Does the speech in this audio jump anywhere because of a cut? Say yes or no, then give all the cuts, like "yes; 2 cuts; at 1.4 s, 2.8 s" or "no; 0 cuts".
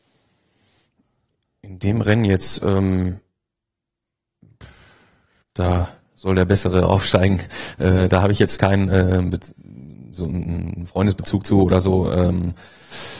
no; 0 cuts